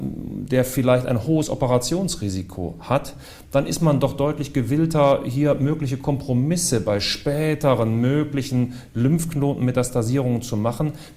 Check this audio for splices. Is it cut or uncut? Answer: uncut